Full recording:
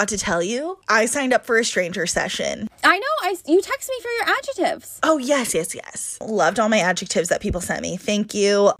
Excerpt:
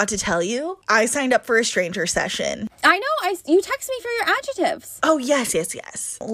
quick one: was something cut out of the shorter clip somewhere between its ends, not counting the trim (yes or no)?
no